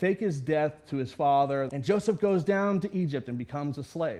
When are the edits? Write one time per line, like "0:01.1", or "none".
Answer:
0:01.7